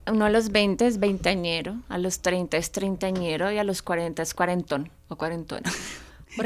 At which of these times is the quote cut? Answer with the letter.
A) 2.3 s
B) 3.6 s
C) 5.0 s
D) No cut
C